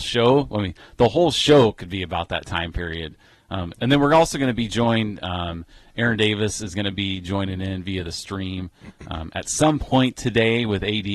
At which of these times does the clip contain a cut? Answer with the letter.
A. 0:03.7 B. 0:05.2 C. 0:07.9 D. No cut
A